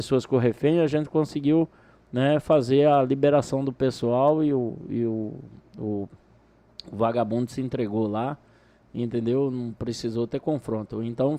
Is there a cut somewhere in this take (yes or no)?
no